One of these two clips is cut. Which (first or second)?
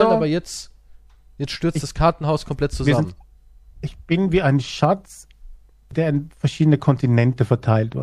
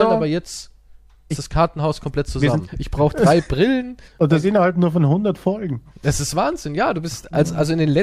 second